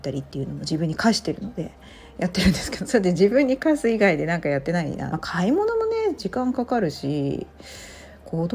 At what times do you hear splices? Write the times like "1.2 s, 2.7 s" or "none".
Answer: 5.1 s